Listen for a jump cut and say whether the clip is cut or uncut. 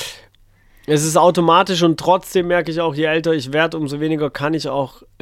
uncut